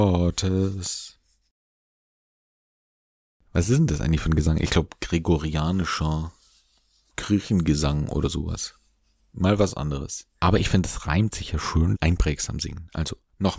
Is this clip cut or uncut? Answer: cut